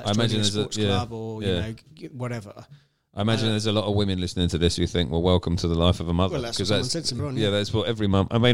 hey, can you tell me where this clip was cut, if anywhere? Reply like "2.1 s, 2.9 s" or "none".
7.2 s

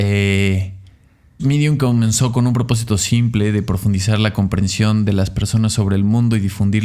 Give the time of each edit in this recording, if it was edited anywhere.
1.4 s

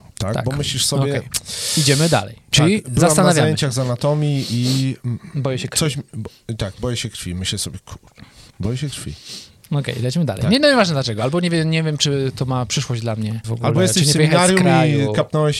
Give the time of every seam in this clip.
13.4 s

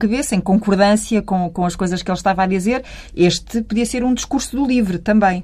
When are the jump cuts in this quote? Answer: none

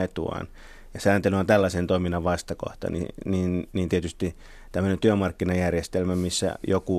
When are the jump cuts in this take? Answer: none

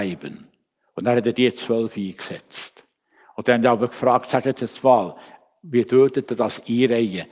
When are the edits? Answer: none

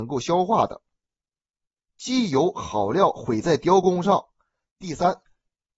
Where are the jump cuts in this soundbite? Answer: 1.9 s, 4.7 s

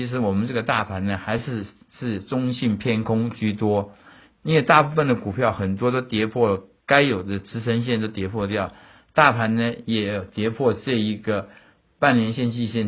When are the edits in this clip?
none

